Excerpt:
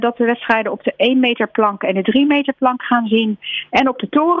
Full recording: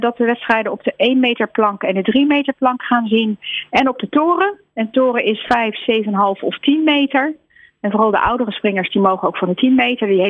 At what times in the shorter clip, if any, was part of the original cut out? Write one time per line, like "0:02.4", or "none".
none

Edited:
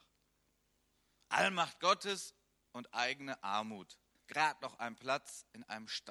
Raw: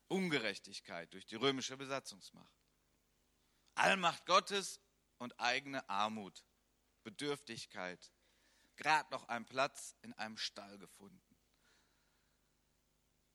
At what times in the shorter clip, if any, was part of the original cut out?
0:04.2

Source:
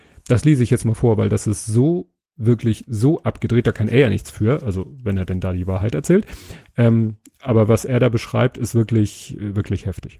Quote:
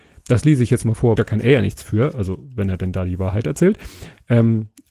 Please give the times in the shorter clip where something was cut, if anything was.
0:01.2

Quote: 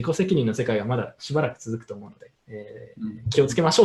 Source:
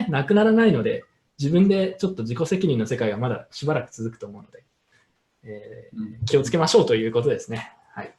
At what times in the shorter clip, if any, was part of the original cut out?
0:02.4

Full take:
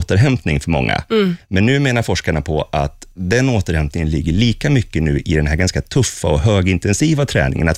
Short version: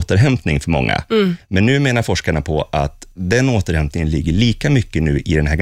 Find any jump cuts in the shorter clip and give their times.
none

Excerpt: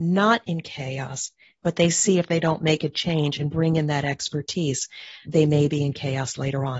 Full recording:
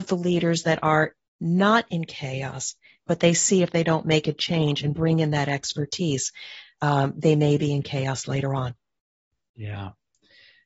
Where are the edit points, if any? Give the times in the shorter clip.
0:05.2

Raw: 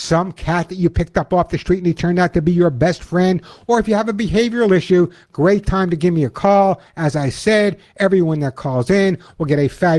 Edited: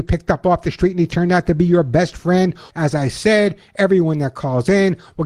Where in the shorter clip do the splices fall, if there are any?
0:02.7

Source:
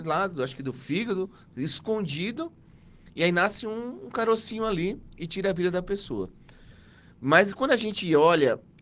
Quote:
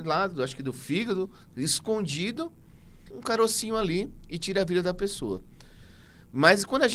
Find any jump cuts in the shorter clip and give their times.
0:03.1

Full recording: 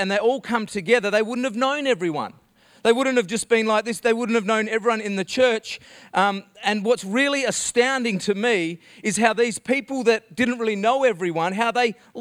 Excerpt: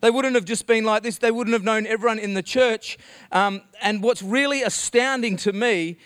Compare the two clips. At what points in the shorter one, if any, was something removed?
none

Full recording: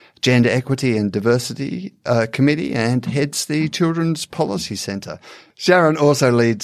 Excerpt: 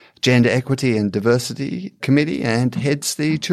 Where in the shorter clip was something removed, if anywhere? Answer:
0:02.0

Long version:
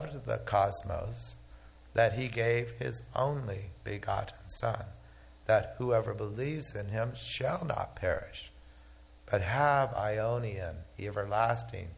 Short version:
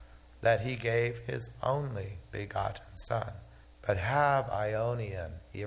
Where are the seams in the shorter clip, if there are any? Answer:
0:03.6

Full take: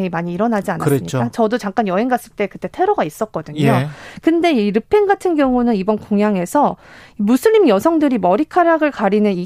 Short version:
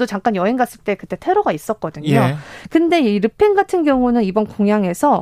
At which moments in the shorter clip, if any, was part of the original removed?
none

